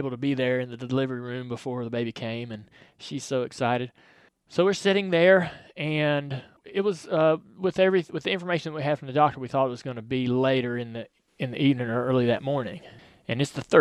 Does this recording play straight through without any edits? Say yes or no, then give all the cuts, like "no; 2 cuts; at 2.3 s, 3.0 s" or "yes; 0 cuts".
yes; 0 cuts